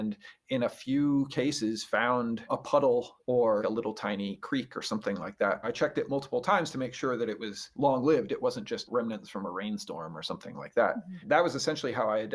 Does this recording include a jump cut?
no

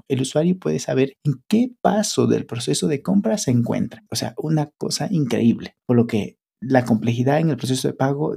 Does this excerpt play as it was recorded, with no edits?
no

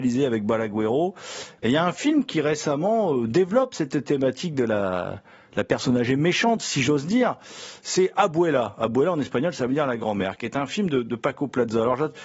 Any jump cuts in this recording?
yes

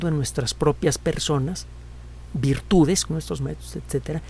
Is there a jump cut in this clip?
yes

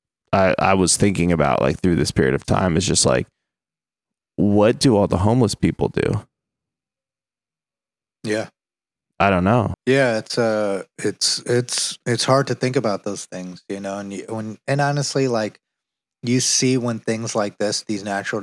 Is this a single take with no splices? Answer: no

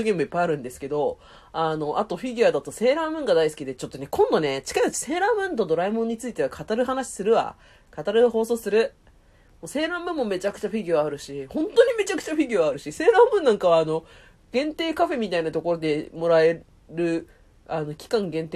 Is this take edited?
no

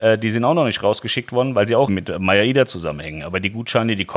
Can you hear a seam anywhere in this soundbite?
yes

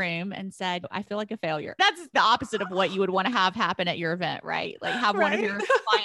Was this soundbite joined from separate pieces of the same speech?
yes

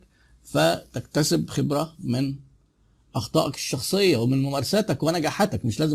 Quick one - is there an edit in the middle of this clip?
no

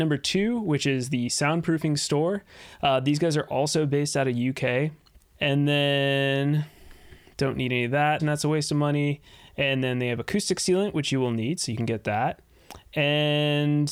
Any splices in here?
yes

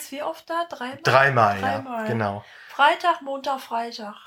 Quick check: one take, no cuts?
yes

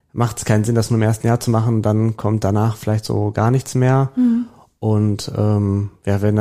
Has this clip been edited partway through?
no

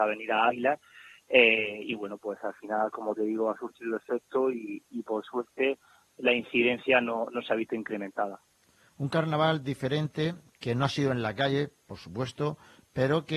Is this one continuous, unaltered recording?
yes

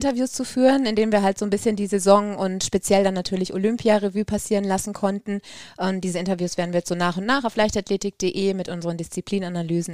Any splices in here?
no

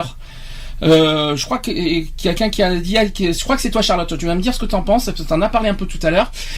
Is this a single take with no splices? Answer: yes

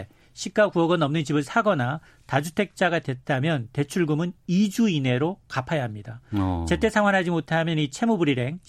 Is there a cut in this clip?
no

